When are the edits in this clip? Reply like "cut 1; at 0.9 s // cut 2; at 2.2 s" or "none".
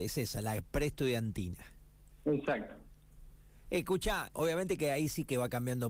cut 1; at 4.3 s